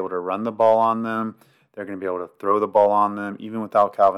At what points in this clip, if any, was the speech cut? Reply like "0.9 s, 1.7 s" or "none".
none